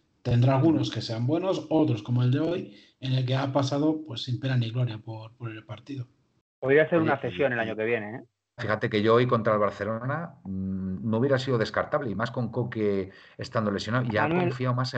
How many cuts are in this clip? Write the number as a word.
one